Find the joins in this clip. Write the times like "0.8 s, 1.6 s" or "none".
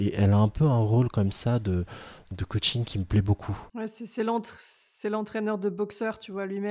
3.7 s